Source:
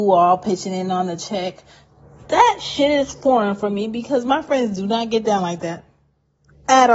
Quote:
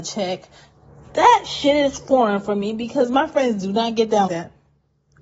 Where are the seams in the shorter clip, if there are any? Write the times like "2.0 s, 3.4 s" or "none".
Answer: 4.3 s